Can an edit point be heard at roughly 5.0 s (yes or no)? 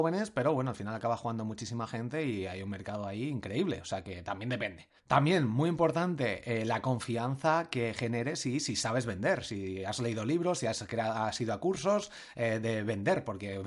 yes